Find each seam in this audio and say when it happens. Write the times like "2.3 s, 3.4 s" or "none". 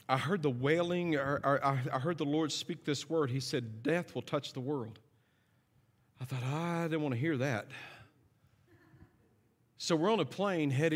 none